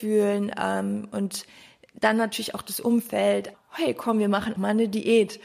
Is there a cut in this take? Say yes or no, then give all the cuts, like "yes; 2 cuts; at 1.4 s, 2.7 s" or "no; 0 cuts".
yes; 2 cuts; at 3.5 s, 4.6 s